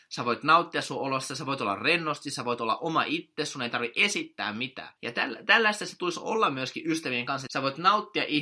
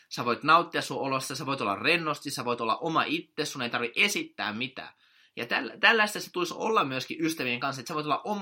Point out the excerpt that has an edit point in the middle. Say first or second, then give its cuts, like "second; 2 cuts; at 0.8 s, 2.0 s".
first; 2 cuts; at 5.0 s, 7.5 s